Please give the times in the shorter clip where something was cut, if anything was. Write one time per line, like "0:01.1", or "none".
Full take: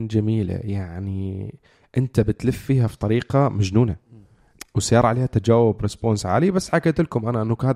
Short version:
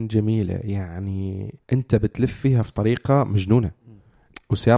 0:01.6